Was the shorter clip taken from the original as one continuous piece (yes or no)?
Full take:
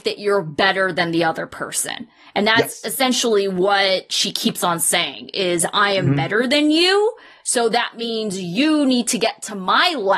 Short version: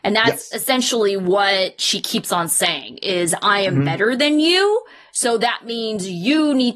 yes